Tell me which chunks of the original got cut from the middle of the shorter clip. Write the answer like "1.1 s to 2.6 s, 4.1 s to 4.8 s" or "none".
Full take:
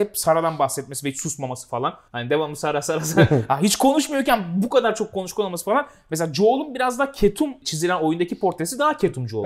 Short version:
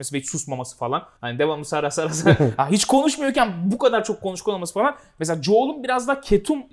none